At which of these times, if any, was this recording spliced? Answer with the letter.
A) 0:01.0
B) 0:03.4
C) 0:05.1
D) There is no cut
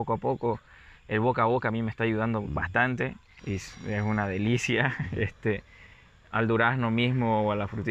B